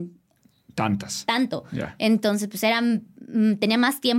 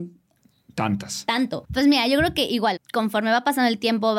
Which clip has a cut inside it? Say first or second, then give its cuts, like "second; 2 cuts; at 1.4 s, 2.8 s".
second; 2 cuts; at 1.6 s, 2.8 s